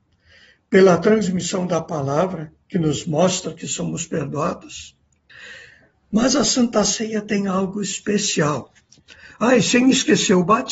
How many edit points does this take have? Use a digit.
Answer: 0